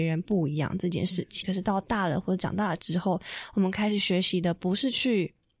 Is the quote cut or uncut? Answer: cut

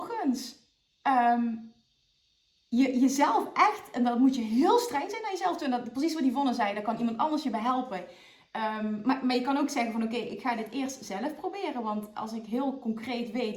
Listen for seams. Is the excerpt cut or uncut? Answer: uncut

